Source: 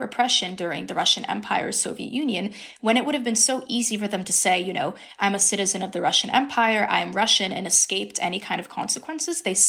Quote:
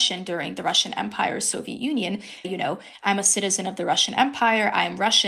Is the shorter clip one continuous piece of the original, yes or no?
no